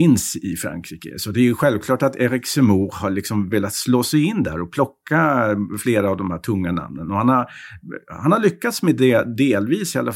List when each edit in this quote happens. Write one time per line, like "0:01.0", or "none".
none